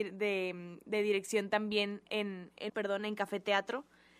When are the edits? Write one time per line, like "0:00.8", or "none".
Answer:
0:02.7